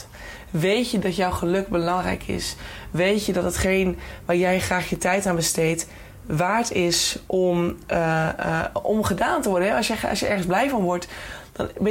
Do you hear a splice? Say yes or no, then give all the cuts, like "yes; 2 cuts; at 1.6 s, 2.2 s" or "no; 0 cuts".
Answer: no; 0 cuts